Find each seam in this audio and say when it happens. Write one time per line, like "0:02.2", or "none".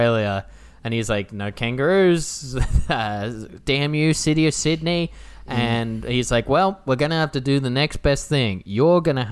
none